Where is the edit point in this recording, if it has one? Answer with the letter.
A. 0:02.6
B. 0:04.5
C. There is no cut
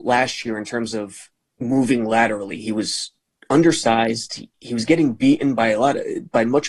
B